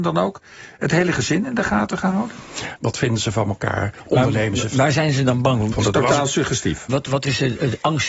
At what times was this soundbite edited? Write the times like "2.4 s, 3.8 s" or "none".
2.8 s, 5.7 s, 6.9 s